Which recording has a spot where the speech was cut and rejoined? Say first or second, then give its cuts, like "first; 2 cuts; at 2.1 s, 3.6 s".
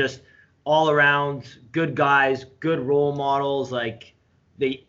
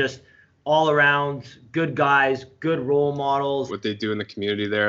second; 1 cut; at 3.7 s